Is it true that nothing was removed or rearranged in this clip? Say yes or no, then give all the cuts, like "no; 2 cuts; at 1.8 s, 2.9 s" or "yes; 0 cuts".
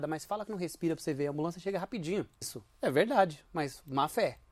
no; 1 cut; at 2.4 s